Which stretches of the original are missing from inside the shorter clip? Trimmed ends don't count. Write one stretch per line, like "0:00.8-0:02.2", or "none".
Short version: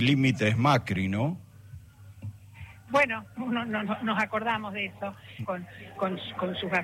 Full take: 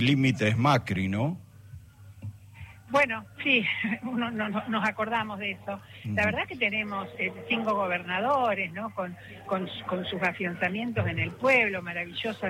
0:03.3-0:04.0
0:06.1-0:08.9

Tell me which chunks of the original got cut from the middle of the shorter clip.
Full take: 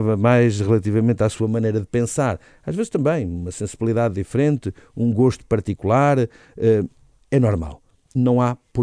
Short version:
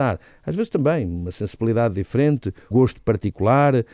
0:04.9-0:05.1

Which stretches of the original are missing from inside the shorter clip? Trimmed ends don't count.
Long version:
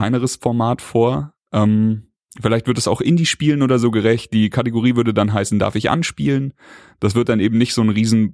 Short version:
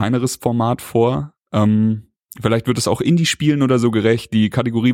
none

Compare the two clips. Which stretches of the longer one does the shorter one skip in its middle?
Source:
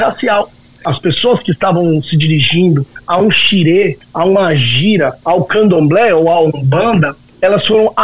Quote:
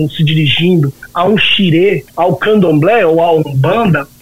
0:04.0-0:05.2

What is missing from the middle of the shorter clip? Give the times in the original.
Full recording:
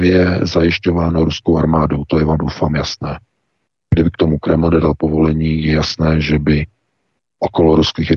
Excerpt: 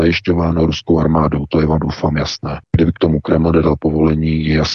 0:03.2-0:03.8

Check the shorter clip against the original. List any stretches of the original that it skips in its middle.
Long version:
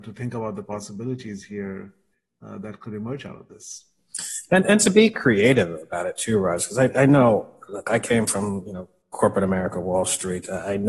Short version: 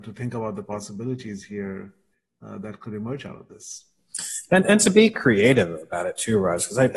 none

